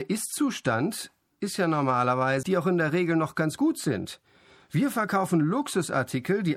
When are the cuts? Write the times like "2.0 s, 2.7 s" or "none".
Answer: 2.4 s